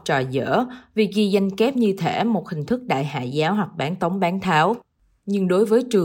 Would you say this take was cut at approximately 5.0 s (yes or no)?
no